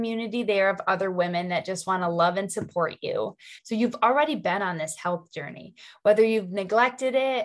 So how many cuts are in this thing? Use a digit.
1